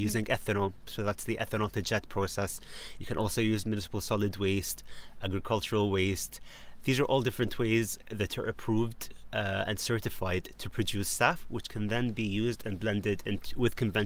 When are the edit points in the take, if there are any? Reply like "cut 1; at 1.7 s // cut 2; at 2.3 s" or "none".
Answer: none